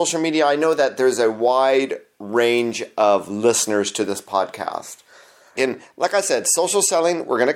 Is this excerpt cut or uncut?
cut